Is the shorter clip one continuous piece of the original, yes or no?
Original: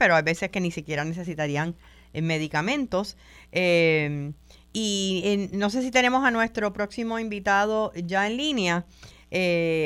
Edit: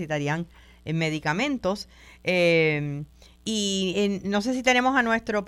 yes